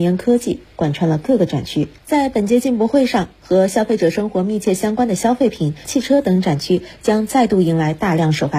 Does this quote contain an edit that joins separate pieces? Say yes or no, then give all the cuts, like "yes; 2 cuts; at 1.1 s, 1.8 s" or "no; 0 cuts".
yes; 2 cuts; at 2.0 s, 5.8 s